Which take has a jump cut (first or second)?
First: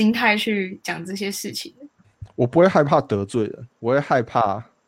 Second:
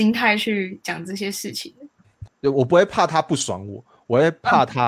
second